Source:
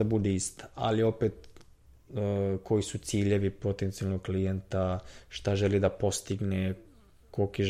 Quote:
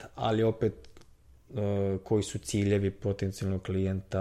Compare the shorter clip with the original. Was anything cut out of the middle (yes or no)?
no